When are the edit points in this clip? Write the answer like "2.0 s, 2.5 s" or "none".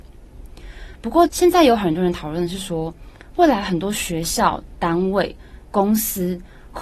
1.3 s